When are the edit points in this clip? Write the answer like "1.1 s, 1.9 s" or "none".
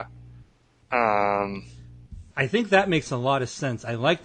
2.3 s